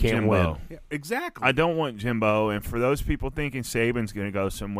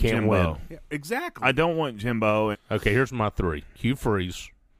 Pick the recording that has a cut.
second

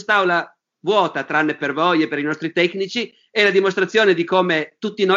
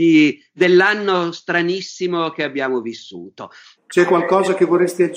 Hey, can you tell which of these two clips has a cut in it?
second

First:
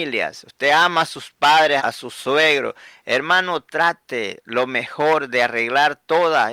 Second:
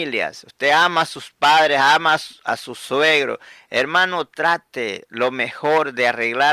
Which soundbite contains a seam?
first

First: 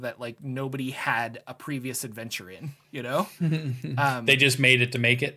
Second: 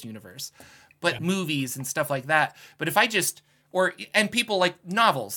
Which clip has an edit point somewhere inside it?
second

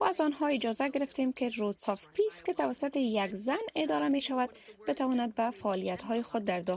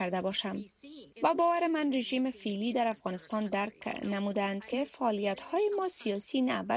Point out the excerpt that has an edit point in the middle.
second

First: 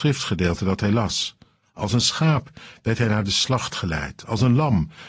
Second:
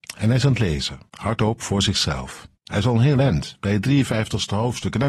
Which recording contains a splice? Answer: second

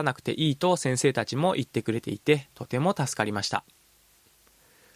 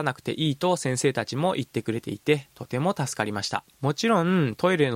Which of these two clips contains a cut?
second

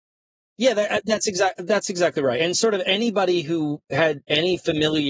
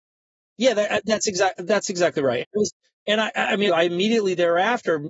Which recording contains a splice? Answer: second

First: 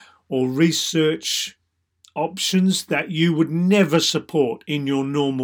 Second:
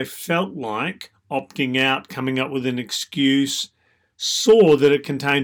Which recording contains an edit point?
second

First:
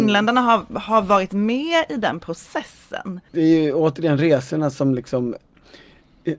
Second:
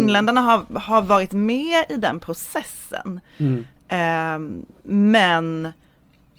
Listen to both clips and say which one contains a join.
first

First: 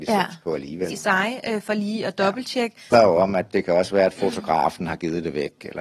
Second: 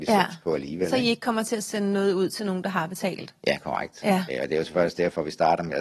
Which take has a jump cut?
first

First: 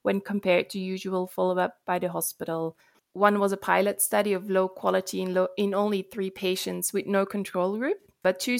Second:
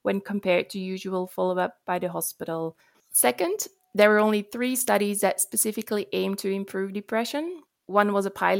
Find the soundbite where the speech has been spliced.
first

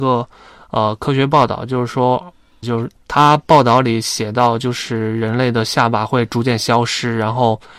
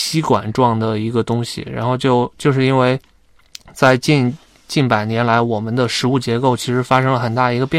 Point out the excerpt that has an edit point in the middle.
first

